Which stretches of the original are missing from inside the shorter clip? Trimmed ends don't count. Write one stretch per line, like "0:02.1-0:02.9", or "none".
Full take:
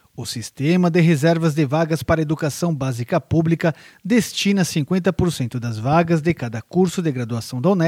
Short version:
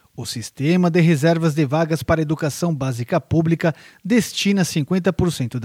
none